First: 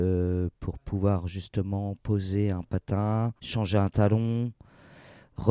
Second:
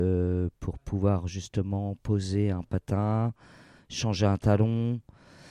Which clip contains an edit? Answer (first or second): first